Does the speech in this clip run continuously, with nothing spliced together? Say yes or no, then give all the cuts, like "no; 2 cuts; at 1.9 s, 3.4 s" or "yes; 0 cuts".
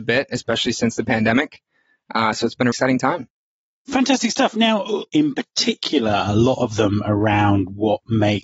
no; 2 cuts; at 2.7 s, 5.1 s